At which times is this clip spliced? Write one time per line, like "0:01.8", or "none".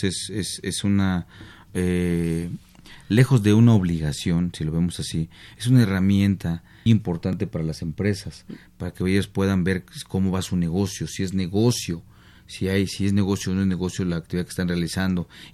0:06.9